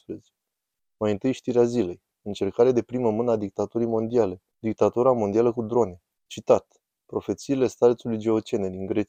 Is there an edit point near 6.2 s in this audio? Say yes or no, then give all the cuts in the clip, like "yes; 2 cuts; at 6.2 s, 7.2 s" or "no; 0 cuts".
yes; 2 cuts; at 4.5 s, 6.2 s